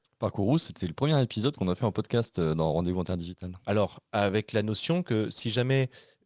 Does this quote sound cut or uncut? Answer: cut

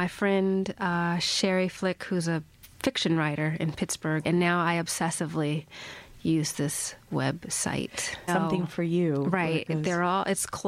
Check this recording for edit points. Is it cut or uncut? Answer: cut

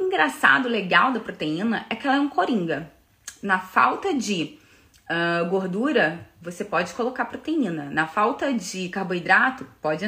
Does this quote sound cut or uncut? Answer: uncut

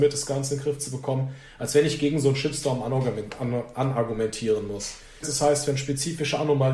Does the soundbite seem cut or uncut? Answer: cut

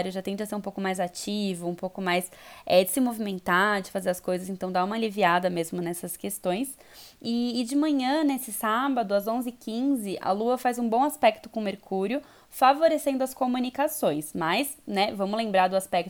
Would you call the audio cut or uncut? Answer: uncut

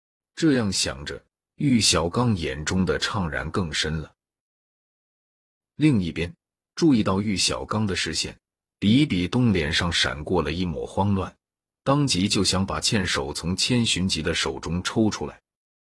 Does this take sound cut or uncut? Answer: uncut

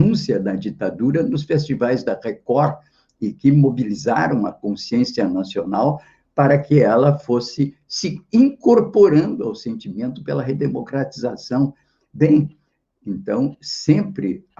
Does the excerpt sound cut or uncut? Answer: uncut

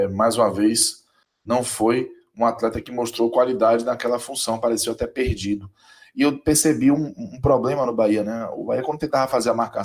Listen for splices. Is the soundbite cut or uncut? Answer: uncut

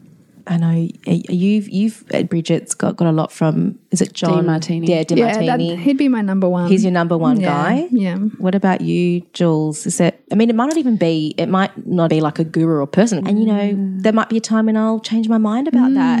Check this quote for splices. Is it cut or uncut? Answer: cut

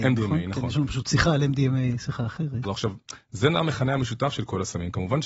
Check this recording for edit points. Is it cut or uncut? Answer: cut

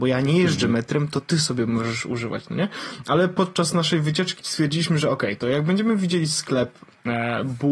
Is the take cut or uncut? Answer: cut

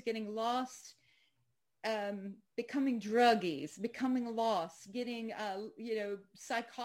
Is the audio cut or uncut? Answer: uncut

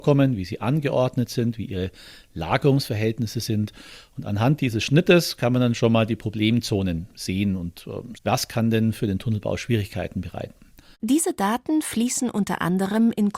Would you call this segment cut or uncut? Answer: cut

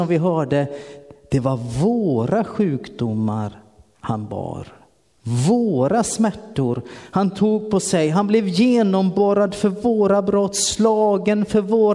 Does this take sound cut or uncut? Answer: uncut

